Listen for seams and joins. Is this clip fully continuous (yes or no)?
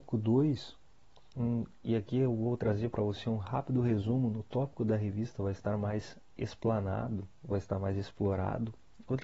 yes